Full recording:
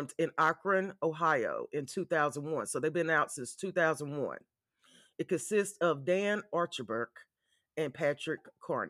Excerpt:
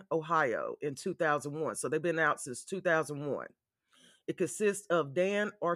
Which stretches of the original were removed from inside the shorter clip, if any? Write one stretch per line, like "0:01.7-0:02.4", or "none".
none